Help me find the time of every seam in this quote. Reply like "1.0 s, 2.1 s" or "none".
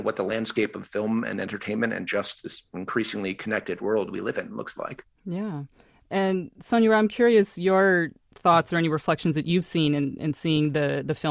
none

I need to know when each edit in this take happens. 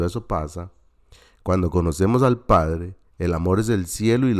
3.0 s

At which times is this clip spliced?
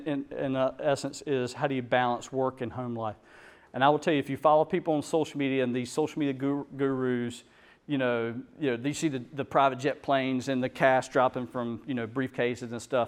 none

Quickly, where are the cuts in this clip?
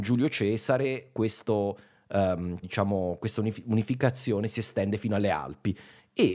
2.6 s

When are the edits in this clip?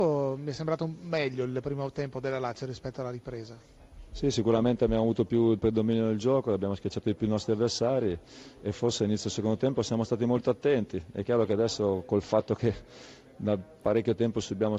none

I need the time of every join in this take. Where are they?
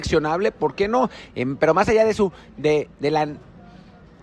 1.3 s

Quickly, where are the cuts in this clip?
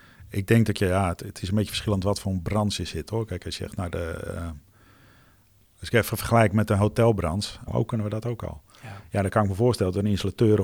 7.7 s

